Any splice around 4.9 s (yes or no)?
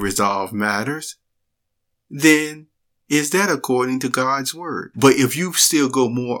yes